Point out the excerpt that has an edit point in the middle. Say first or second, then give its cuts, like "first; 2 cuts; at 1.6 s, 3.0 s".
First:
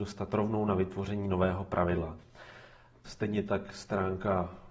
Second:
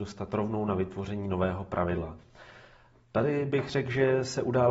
first; 1 cut; at 3.0 s